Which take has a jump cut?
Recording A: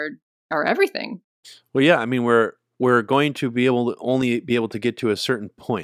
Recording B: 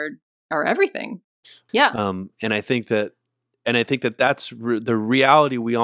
B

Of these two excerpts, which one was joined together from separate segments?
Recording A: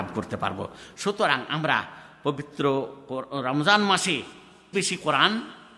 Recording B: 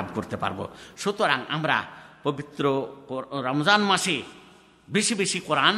A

